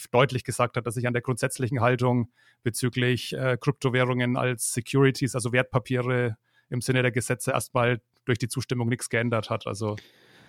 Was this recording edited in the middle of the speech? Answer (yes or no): no